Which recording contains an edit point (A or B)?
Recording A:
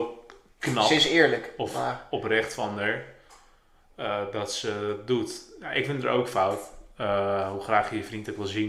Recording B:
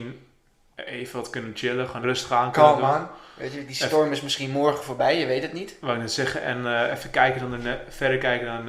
B